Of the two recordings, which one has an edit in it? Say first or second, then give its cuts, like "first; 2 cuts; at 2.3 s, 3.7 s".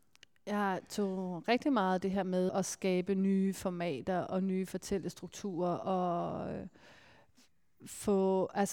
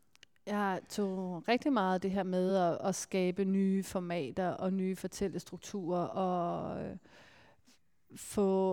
first; 1 cut; at 2.5 s